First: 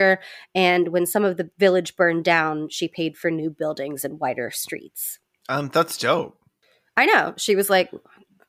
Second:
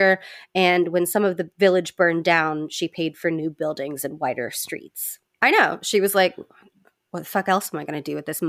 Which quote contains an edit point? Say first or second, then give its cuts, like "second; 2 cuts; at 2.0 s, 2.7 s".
second; 1 cut; at 5.4 s